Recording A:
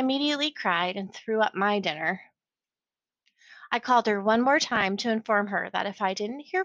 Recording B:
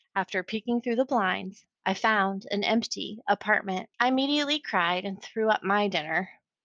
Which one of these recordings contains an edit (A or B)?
B